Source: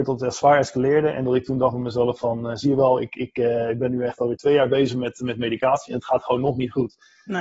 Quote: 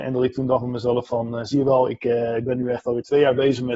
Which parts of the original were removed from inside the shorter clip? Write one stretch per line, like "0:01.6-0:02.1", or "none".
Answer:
0:03.1-0:03.3